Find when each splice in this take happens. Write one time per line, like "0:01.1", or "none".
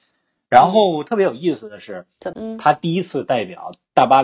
0:02.3